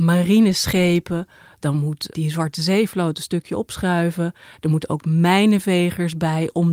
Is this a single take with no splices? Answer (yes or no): no